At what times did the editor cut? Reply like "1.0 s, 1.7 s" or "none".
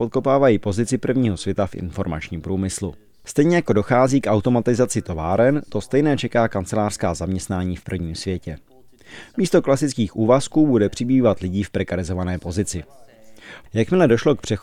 13.7 s